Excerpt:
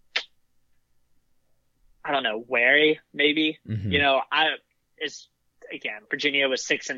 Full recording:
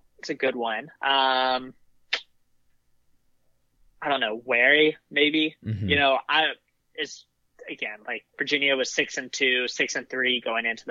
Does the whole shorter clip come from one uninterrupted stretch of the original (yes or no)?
no